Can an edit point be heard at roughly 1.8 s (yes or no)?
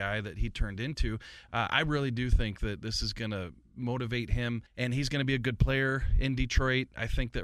no